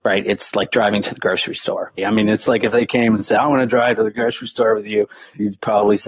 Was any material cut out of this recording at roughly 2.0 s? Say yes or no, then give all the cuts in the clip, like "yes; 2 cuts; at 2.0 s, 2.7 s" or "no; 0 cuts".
yes; 1 cut; at 2.0 s